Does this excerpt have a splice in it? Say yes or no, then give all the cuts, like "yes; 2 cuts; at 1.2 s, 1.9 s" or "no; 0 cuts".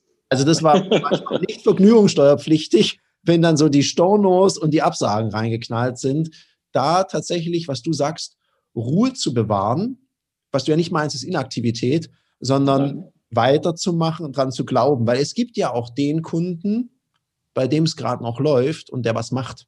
no; 0 cuts